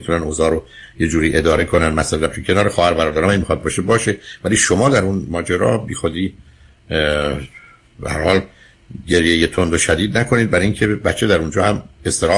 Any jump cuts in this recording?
no; 0 cuts

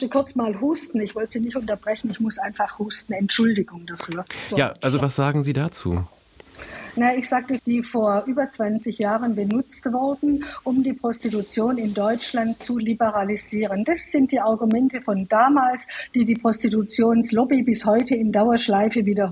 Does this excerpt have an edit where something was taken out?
yes; 2 cuts; at 5.0 s, 7.6 s

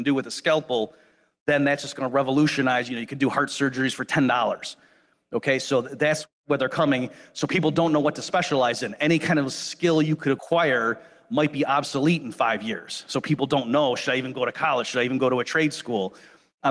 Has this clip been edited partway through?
no; 0 cuts

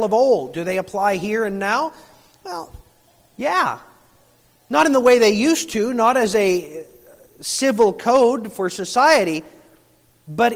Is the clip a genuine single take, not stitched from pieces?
yes; 0 cuts

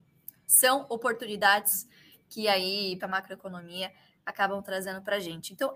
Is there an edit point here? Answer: yes; 1 cut; at 3.0 s

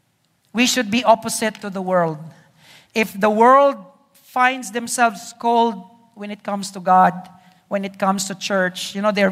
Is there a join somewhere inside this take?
no; 0 cuts

